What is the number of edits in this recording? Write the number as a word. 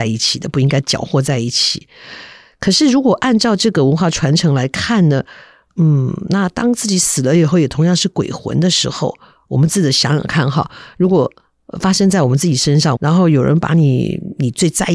one